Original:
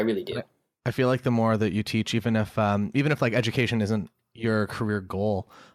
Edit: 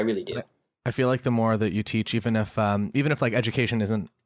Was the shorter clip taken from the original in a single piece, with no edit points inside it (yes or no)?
yes